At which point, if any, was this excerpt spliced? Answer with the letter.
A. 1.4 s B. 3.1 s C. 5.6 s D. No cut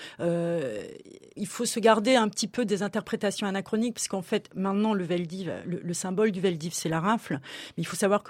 A